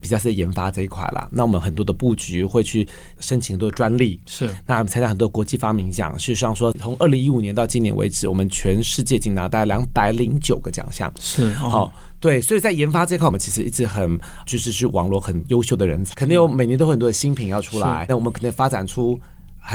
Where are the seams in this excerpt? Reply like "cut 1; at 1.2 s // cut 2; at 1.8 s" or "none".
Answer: cut 1; at 16.1 s // cut 2; at 18.1 s